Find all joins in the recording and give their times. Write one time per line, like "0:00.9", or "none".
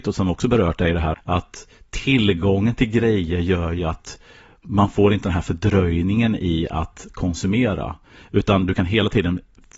0:01.1

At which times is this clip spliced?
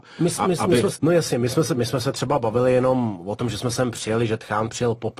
0:00.9

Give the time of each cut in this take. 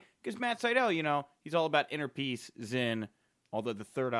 none

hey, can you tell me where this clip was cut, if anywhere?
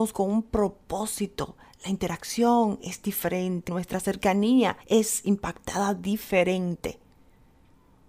0:03.7
0:04.8

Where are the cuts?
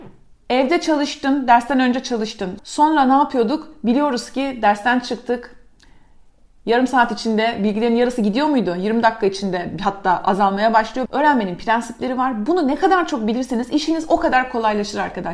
0:02.6
0:11.1

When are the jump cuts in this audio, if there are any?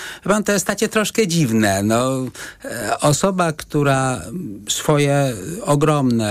none

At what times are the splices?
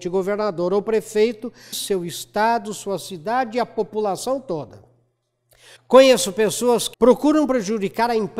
0:01.7
0:05.8
0:06.9

